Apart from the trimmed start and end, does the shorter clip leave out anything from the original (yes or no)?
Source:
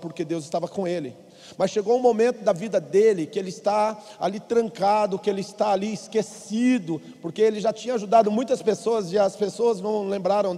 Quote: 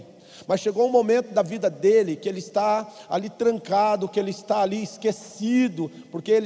no